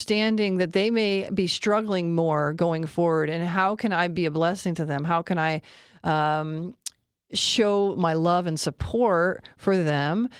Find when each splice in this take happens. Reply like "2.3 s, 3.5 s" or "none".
none